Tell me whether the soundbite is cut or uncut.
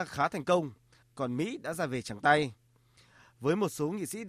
cut